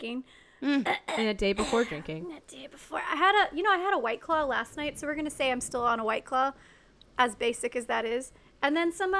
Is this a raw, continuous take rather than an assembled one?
yes; 0 cuts

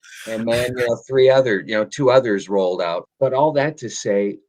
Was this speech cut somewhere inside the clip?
yes; 1 cut; at 3.0 s

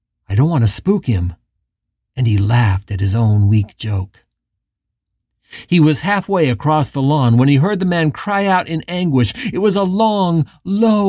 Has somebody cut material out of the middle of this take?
no; 0 cuts

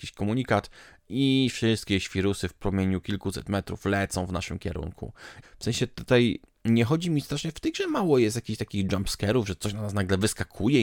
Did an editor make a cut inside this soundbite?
yes; 1 cut; at 5.4 s

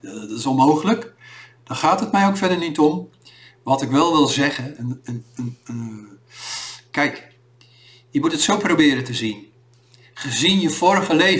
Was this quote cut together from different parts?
no; 0 cuts

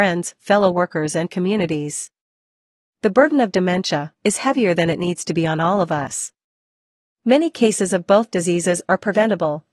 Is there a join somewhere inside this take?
yes; 1 cut; at 4.1 s

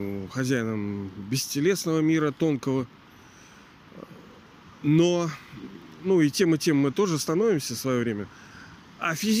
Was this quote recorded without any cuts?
yes; 0 cuts

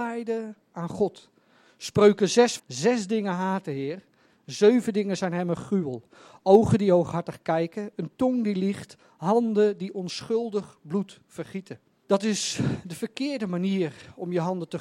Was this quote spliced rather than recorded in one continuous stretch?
yes; 2 cuts; at 2.6 s, 12.0 s

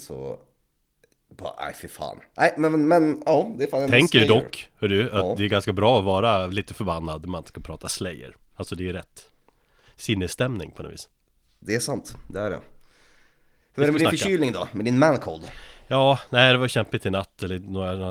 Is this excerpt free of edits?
yes; 0 cuts

